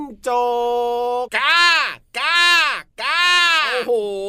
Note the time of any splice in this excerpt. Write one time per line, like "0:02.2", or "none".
0:01.3